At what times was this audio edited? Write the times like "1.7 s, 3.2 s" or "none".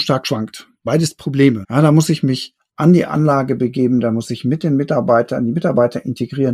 1.6 s